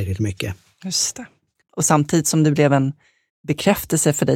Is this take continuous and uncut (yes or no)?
yes